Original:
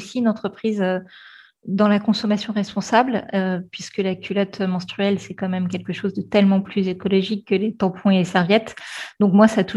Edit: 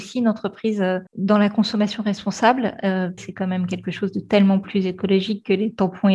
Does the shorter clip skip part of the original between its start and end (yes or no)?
yes